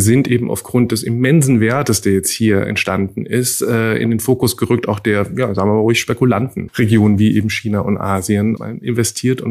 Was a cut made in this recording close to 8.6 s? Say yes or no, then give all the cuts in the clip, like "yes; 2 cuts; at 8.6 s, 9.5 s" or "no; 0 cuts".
yes; 2 cuts; at 6.7 s, 8.6 s